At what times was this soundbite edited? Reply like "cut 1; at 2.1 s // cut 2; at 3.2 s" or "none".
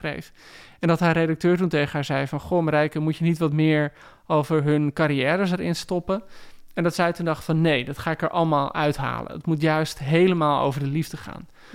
none